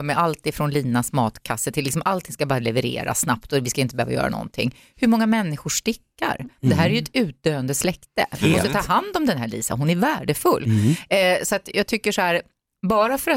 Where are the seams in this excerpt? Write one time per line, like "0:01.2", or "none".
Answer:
none